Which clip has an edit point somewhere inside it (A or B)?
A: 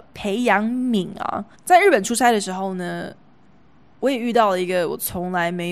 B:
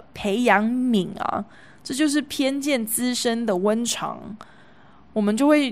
A